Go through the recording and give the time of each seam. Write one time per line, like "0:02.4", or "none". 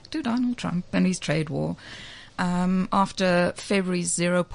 0:02.3